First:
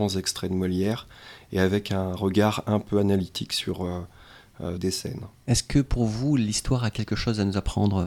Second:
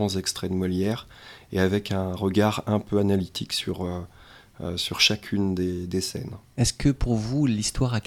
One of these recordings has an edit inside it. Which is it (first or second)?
first